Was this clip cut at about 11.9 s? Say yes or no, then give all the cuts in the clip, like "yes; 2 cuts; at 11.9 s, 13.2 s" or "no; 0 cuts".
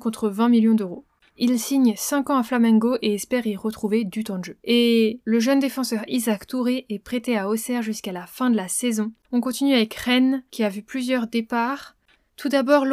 no; 2 cuts; at 4.6 s, 9.2 s